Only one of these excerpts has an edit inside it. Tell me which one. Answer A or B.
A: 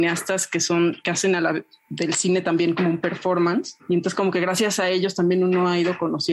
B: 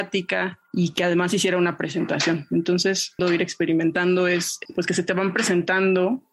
B